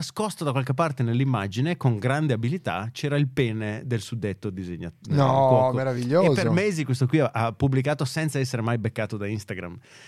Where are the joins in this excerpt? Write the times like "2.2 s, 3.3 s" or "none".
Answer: none